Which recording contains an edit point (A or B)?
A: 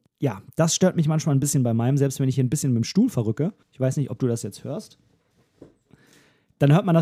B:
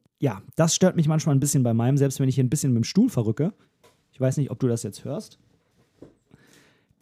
A